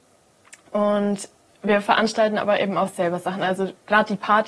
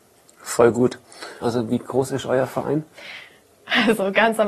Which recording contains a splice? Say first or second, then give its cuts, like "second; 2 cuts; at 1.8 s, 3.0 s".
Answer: second; 1 cut; at 1.4 s